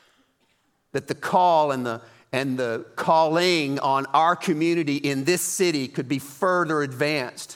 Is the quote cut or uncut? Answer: uncut